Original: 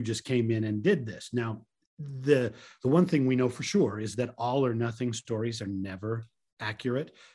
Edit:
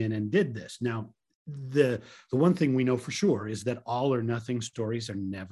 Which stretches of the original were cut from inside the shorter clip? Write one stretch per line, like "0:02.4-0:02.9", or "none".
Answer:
none